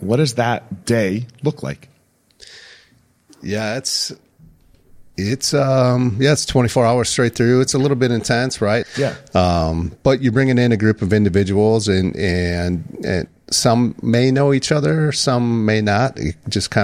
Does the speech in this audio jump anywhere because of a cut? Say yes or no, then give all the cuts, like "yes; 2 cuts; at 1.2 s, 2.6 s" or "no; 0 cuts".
yes; 1 cut; at 8.8 s